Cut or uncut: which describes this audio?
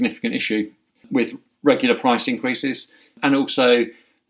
cut